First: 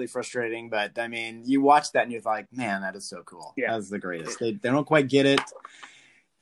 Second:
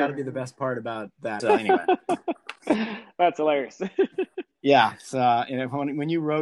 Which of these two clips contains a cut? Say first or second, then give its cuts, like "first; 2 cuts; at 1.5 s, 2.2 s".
second; 1 cut; at 1.4 s